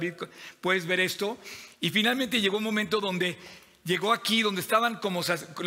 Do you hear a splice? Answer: no; 0 cuts

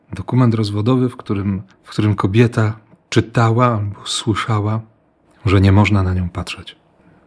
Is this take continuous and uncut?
no; 2 cuts; at 1.7 s, 5.3 s

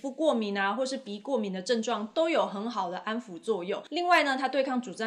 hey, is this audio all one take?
yes; 0 cuts

